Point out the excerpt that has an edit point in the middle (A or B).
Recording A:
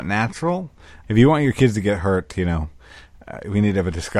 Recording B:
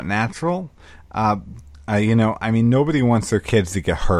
A